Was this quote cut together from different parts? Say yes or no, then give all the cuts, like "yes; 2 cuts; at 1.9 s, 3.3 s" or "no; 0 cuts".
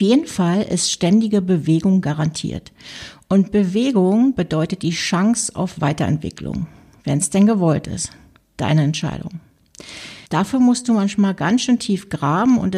yes; 1 cut; at 10.3 s